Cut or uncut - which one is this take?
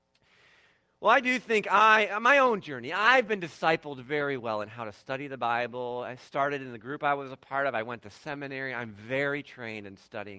uncut